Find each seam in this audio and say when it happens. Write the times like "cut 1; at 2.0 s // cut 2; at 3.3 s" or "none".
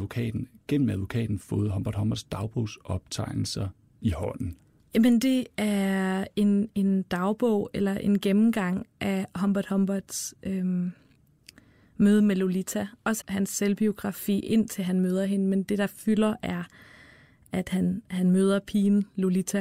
cut 1; at 4.8 s // cut 2; at 13.2 s